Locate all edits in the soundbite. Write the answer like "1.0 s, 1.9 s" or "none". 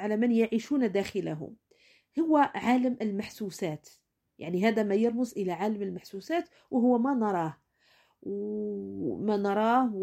none